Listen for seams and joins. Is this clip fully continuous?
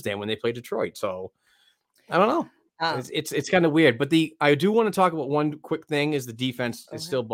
yes; 0 cuts

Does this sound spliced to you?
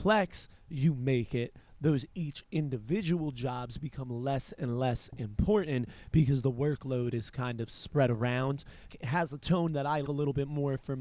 yes; 2 cuts; at 8.9 s, 10.0 s

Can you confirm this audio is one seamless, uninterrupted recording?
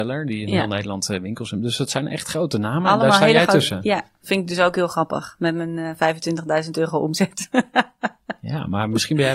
yes; 0 cuts

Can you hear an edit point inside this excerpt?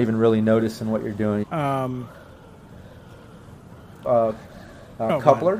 yes; 2 cuts; at 1.4 s, 4.0 s

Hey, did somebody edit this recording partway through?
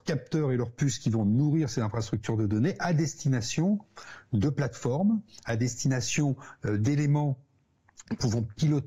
no; 0 cuts

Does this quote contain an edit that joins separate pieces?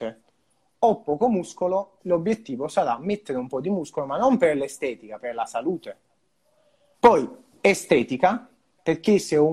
yes; 2 cuts; at 2.0 s, 6.9 s

